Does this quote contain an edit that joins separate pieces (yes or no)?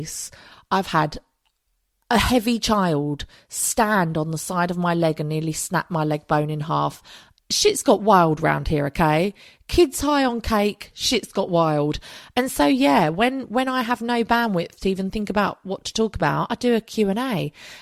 no